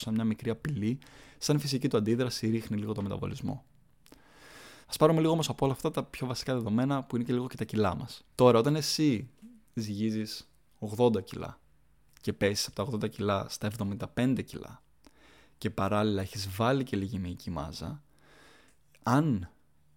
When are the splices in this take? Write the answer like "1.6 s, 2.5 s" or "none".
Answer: 4.8 s, 8.3 s

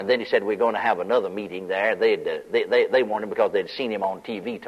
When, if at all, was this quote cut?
none

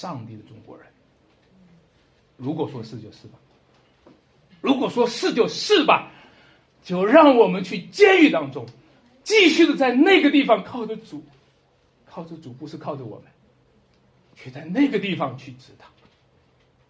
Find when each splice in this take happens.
2.4 s

